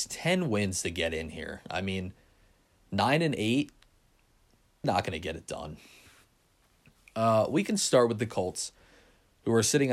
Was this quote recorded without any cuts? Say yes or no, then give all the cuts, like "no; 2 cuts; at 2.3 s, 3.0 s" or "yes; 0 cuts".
no; 1 cut; at 4.8 s